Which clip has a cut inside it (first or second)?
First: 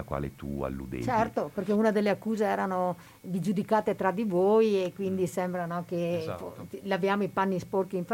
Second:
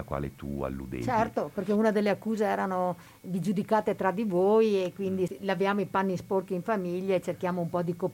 second